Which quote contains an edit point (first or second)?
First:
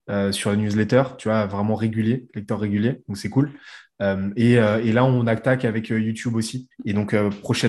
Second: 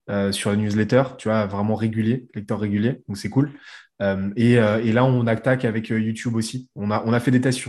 first